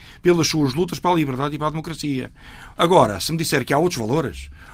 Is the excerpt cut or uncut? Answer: uncut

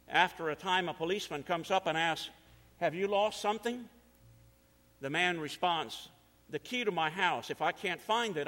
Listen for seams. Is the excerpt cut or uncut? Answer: uncut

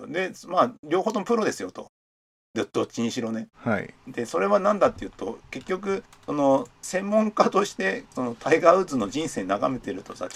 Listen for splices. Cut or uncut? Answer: cut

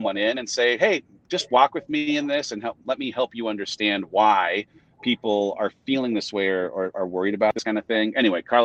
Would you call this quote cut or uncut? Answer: uncut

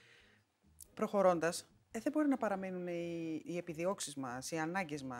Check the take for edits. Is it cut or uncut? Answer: cut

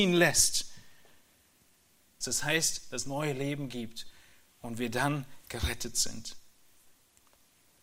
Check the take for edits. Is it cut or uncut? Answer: cut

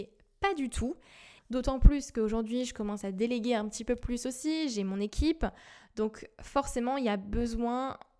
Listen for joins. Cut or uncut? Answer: cut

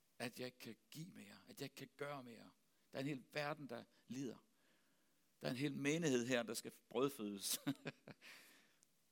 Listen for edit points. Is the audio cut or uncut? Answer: uncut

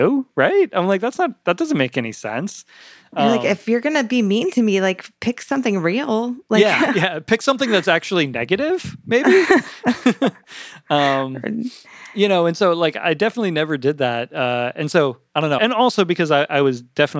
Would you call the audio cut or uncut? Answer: cut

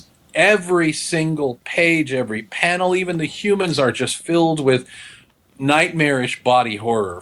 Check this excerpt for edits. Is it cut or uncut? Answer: uncut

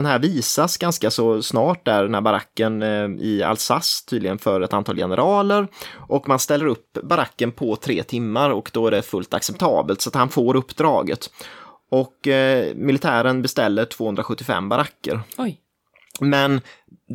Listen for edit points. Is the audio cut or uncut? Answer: uncut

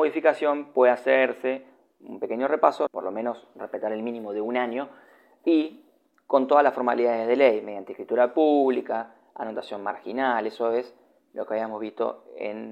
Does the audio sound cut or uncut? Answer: cut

